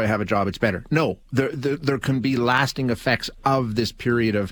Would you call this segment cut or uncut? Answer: uncut